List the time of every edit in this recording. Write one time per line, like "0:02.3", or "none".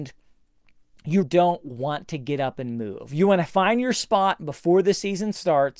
0:01.2